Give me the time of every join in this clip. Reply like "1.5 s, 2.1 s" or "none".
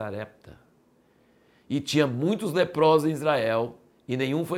none